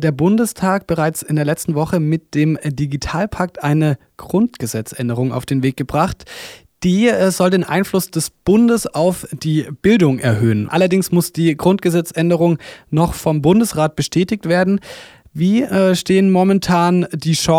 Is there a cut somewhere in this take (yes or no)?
no